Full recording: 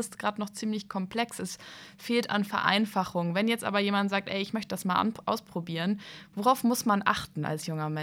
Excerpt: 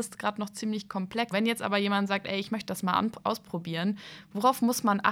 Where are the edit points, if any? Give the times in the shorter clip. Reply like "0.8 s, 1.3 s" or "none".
1.3 s